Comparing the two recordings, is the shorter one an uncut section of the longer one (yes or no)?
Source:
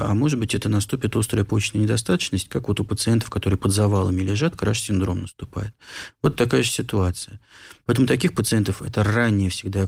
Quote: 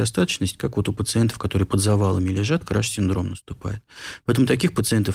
no